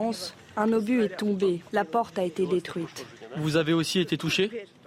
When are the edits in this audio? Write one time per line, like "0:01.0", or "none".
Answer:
0:01.7